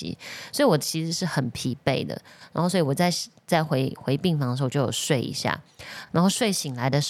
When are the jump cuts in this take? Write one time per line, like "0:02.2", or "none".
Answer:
none

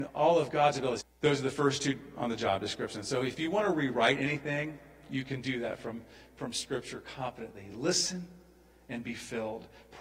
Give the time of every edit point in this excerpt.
0:01.0

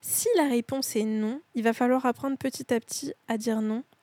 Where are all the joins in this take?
0:01.5

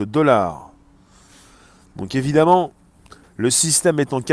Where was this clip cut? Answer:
0:03.2

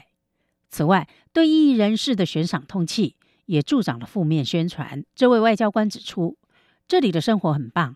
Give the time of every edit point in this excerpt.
0:05.1

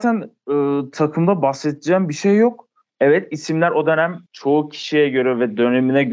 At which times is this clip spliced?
0:02.8
0:04.3

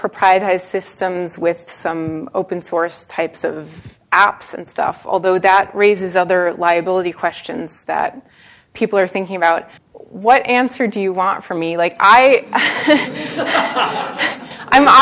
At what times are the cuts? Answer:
0:09.8

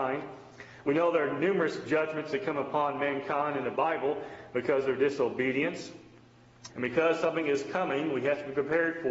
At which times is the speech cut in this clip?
0:06.7

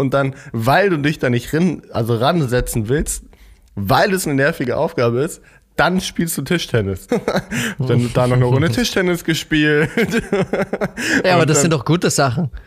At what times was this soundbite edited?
0:07.1

